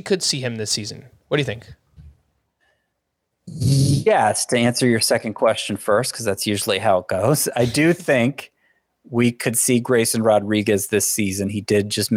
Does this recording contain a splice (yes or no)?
no